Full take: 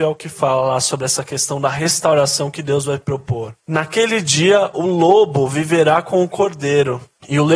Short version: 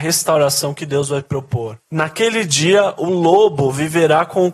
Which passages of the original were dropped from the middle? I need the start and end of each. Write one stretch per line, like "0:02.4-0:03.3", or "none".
none